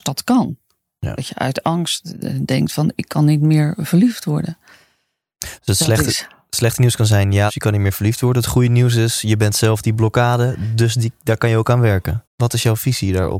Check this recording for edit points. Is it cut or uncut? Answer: cut